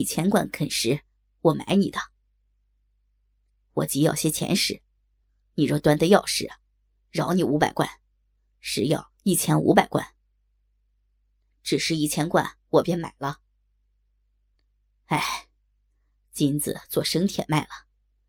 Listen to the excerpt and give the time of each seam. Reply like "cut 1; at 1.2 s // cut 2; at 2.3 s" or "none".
none